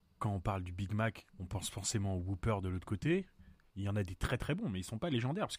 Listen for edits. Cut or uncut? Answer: cut